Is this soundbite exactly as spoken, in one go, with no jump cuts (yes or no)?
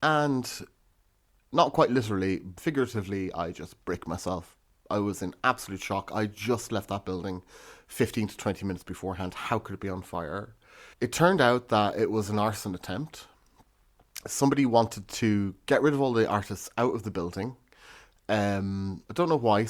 no